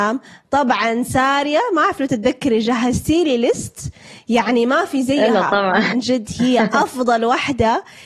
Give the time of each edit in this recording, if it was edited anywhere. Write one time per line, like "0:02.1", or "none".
0:05.9